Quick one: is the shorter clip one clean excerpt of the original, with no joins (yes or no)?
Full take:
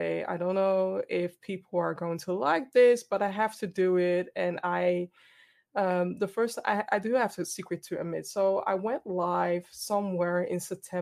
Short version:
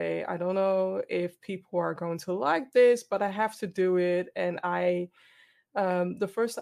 yes